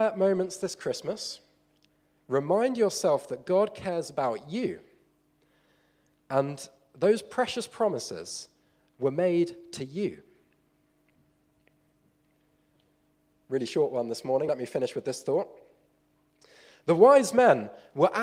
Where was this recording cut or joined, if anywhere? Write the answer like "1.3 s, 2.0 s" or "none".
none